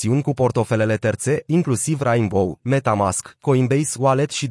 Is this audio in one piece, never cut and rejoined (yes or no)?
no